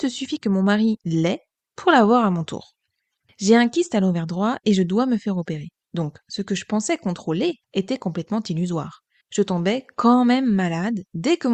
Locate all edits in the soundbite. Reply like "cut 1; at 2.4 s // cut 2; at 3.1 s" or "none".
cut 1; at 6.2 s // cut 2; at 7.6 s // cut 3; at 9.2 s